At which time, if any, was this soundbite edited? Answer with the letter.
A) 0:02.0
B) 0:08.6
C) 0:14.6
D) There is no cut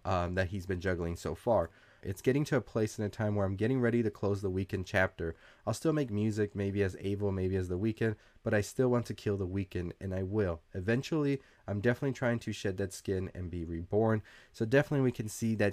A